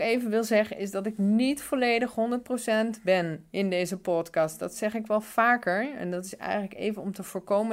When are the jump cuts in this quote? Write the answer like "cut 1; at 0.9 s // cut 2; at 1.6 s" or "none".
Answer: none